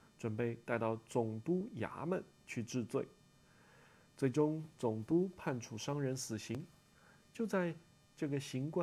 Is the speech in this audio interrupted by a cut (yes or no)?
no